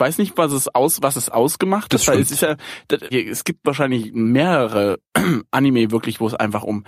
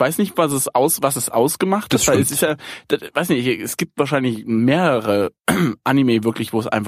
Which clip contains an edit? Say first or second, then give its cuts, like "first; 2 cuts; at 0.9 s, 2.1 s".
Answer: first; 1 cut; at 3.1 s